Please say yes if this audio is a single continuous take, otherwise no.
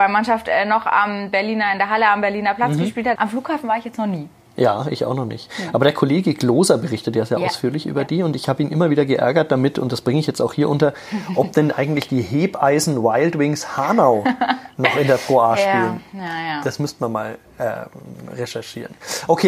no